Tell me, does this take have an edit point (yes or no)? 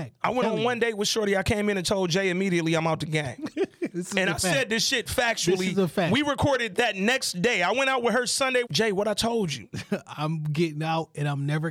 yes